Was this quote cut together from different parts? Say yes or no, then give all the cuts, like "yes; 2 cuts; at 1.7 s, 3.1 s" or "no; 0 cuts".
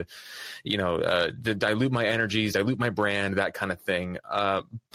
no; 0 cuts